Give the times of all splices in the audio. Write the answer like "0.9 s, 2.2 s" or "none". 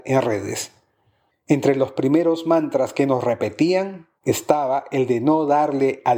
1.3 s